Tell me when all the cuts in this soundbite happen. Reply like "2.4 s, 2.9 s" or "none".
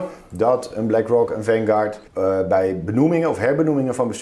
2.1 s